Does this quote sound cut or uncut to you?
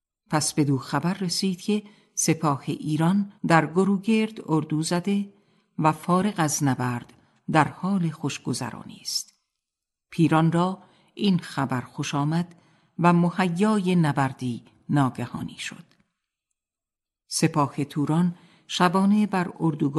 cut